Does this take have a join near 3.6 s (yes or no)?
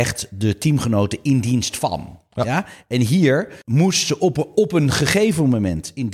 yes